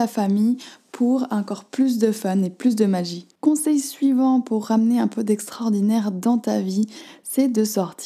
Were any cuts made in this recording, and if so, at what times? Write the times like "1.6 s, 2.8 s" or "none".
3.4 s

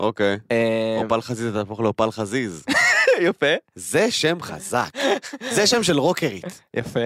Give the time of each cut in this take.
none

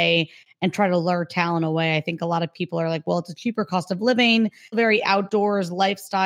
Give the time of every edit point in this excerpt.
4.7 s

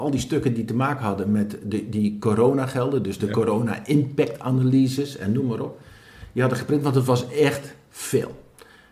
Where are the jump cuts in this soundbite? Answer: none

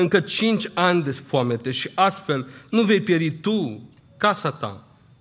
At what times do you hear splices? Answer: none

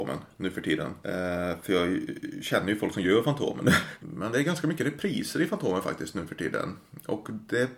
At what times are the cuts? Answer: 1.0 s, 4.0 s

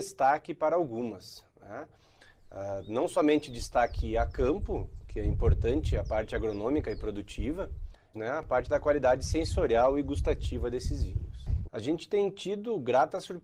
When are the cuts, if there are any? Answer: 8.1 s, 11.6 s

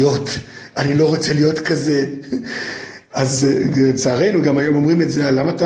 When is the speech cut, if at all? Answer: none

